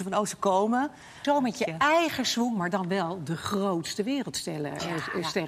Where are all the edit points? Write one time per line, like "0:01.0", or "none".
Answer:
0:01.2